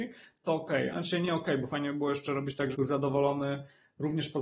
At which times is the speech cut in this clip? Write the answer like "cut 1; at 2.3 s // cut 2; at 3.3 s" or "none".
cut 1; at 0.9 s // cut 2; at 2.7 s